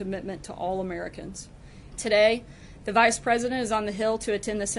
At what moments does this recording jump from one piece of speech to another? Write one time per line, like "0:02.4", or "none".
0:01.9